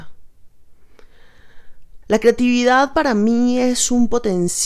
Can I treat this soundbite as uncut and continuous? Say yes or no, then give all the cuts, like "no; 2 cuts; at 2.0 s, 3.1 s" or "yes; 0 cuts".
no; 1 cut; at 2.0 s